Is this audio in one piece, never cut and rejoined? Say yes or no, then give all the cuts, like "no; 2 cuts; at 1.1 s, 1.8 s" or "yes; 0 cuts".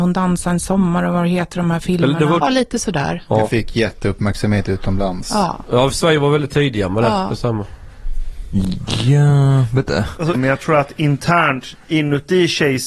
no; 2 cuts; at 2.4 s, 10.3 s